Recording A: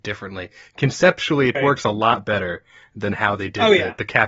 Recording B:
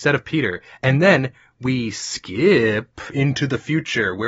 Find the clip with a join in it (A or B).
A